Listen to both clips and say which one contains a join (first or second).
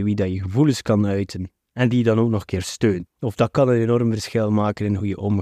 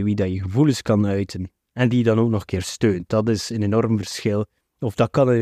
first